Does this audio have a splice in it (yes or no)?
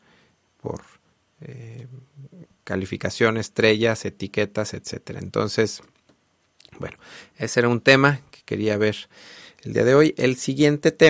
no